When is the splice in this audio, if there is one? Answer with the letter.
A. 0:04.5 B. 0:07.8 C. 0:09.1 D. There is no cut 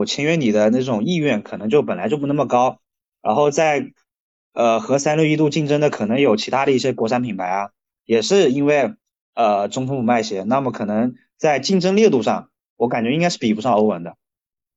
D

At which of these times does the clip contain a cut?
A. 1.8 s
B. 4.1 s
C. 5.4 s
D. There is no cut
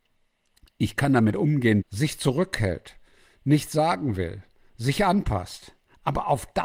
A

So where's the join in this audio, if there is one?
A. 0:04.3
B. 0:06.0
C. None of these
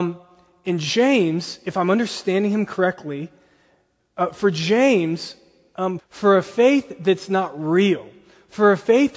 B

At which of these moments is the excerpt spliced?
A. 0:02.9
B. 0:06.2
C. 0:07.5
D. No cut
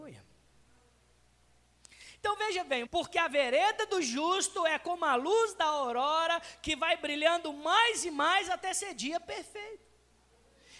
A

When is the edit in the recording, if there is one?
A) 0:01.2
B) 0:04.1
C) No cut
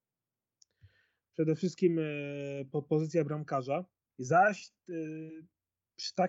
B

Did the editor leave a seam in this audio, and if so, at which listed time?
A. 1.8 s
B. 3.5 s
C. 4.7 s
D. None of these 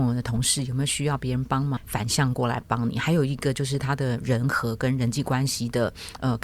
A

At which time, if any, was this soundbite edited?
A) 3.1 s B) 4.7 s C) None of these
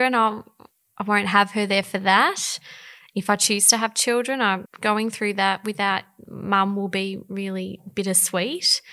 B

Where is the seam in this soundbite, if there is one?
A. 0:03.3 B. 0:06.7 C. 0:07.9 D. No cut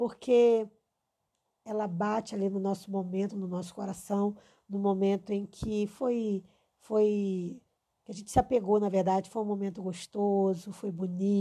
D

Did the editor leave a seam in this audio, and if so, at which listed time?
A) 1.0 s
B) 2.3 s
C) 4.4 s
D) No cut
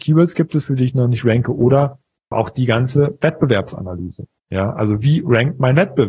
B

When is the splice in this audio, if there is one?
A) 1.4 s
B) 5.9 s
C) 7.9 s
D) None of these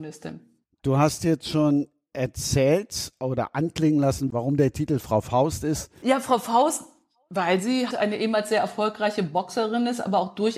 C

